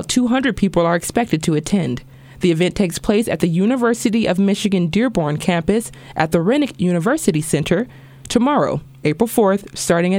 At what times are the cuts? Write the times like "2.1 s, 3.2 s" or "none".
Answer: none